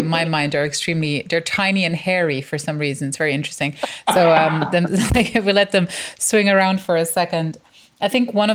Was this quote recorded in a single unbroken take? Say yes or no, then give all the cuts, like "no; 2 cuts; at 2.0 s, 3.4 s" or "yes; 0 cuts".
yes; 0 cuts